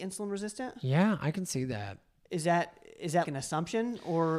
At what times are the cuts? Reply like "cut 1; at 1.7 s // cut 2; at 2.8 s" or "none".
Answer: cut 1; at 3.2 s